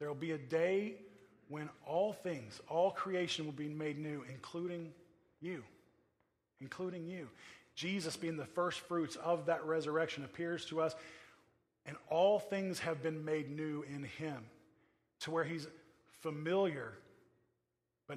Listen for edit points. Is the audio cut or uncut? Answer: uncut